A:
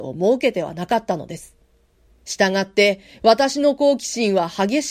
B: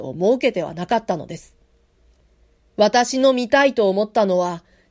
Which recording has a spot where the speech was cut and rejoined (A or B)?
A